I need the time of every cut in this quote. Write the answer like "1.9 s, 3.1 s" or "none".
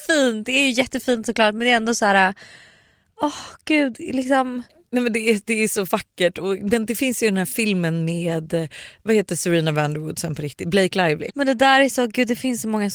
11.3 s